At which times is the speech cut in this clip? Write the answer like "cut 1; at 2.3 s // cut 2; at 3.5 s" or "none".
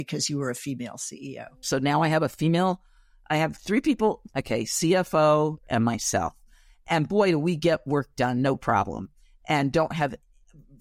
cut 1; at 1.6 s // cut 2; at 4.3 s // cut 3; at 5.6 s